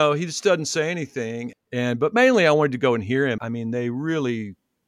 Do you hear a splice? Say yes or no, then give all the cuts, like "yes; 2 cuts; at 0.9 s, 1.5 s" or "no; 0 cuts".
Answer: yes; 2 cuts; at 1.5 s, 3.4 s